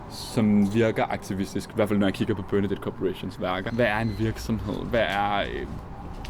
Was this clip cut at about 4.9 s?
no; 1 cut; at 3.7 s

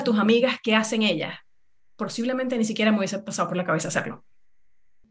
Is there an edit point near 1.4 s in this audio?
no; 0 cuts

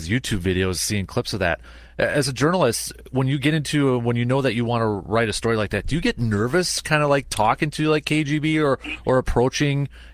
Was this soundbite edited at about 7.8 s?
no; 0 cuts

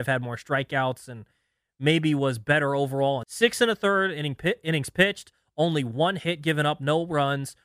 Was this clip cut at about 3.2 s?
yes; 1 cut; at 3.2 s

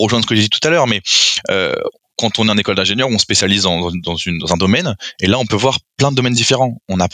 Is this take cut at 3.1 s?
no; 0 cuts

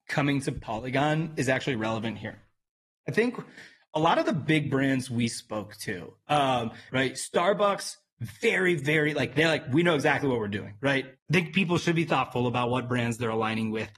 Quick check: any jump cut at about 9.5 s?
no; 2 cuts; at 6.9 s, 11.2 s

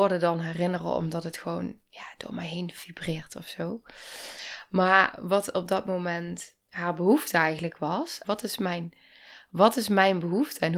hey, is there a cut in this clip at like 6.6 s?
yes; 2 cuts; at 6.6 s, 8.2 s

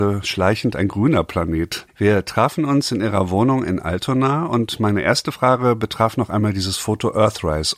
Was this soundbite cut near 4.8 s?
no; 1 cut; at 1.9 s

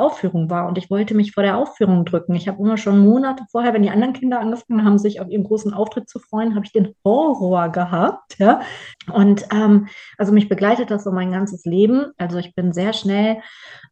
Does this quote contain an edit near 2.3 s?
no; 2 cuts; at 8.9 s, 12.2 s

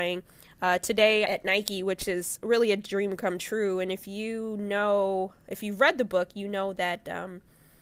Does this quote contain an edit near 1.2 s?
yes; 1 cut; at 1.2 s

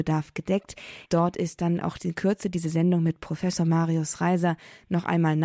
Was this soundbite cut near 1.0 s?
yes; 1 cut; at 1.0 s

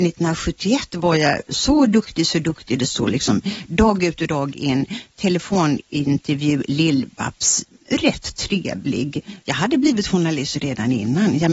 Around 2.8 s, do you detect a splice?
no; 1 cut; at 9.4 s

